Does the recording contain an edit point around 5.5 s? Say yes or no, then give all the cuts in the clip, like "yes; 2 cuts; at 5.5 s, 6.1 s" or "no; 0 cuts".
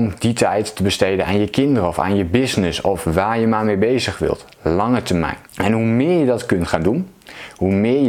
yes; 1 cut; at 5.5 s